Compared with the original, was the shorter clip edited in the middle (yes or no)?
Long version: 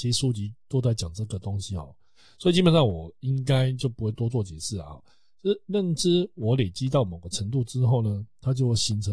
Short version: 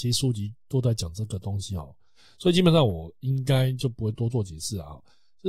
no